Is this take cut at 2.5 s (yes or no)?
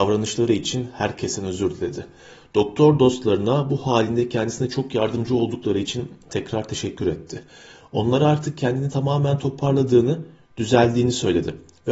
no